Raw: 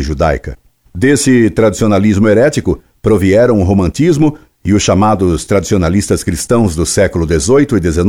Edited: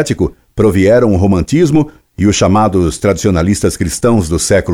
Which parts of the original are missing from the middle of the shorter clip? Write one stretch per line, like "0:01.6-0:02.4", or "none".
none

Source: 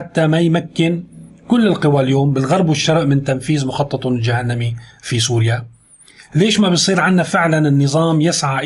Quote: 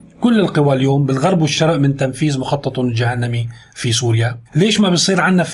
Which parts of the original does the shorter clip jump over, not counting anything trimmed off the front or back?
0:05.7-0:06.3

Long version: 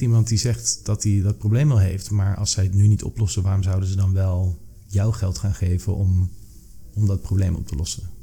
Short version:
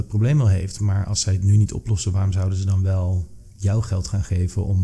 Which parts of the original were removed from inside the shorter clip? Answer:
none

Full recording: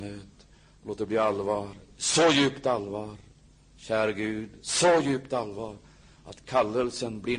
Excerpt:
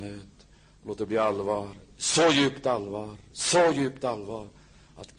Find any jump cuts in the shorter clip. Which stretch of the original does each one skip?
0:03.3-0:04.6

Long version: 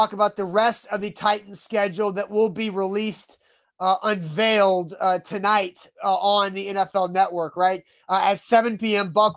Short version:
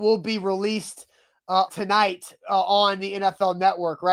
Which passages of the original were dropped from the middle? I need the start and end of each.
0:04.0-0:05.2

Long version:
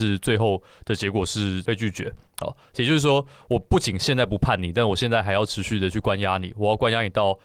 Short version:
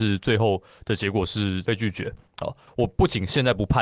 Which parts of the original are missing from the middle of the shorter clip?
0:02.7-0:03.4

